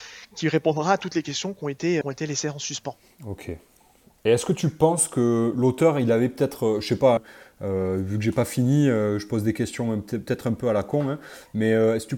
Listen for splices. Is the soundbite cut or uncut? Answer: cut